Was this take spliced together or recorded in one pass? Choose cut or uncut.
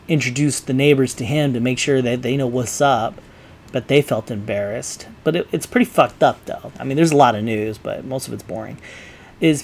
cut